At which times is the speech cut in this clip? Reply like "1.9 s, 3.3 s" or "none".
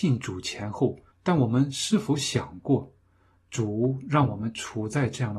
1.1 s